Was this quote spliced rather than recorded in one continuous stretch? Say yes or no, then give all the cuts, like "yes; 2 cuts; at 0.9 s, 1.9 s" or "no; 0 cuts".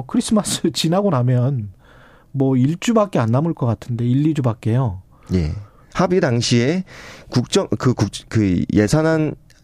yes; 1 cut; at 5.9 s